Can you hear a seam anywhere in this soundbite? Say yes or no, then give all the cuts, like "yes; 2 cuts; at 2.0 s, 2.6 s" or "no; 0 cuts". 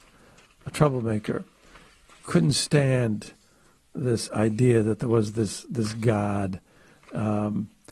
no; 0 cuts